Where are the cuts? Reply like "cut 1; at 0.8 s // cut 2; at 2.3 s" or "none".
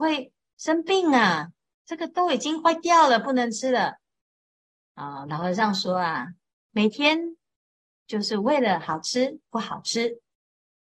cut 1; at 6.5 s